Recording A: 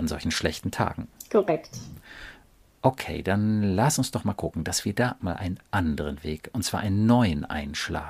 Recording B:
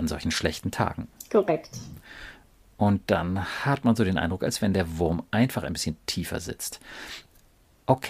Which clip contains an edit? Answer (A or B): A